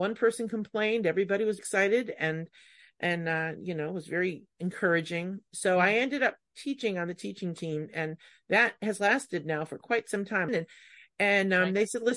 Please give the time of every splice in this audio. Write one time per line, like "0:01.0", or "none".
0:01.6
0:10.5